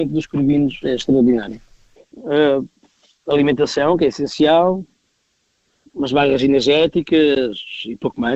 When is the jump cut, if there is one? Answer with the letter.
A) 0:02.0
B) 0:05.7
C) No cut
A